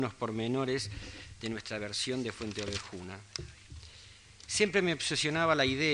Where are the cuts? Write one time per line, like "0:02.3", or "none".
none